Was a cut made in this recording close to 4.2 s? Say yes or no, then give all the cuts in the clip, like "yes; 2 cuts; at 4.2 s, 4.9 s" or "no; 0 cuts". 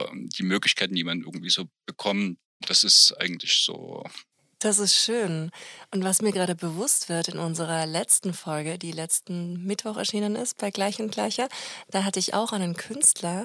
no; 1 cut; at 2.6 s